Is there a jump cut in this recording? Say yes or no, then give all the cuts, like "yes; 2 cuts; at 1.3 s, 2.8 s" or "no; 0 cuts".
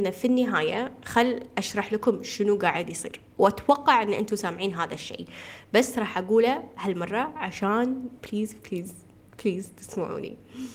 no; 0 cuts